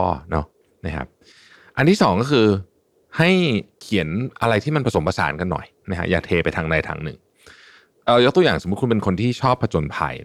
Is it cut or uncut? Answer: uncut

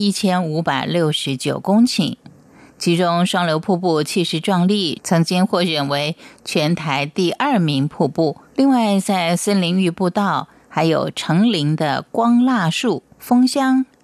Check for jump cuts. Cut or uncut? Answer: cut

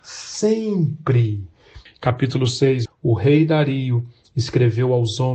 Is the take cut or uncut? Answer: cut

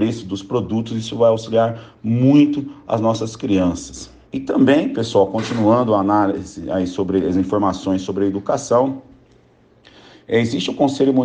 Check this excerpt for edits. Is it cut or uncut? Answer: cut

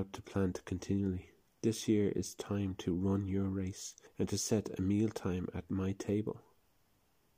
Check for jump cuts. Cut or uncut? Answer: cut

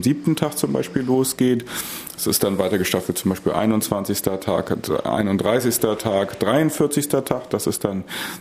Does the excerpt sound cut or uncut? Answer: uncut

